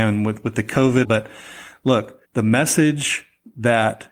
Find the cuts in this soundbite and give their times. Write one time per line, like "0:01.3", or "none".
0:01.0
0:02.2